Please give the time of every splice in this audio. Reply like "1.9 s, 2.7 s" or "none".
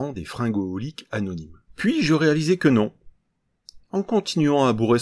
1.7 s, 3.8 s